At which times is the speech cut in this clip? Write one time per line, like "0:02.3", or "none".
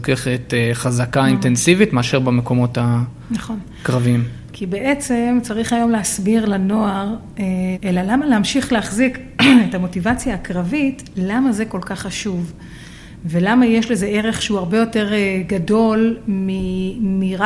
0:04.5
0:07.7